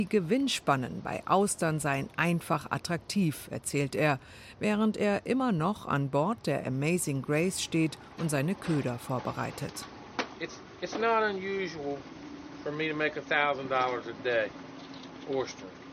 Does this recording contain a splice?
no; 0 cuts

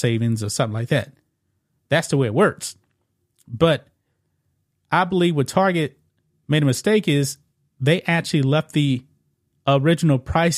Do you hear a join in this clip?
no; 0 cuts

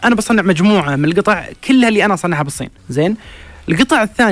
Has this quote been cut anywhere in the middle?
yes; 1 cut; at 2.8 s

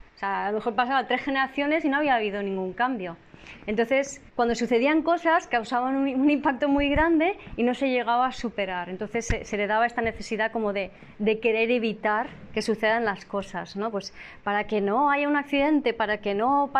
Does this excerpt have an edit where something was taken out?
yes; 1 cut; at 4.3 s

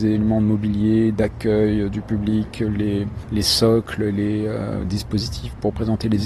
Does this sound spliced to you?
no; 0 cuts

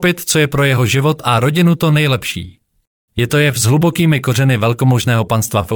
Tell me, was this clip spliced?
yes; 1 cut; at 3.1 s

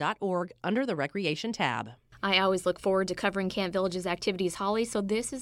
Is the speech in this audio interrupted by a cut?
no; 0 cuts

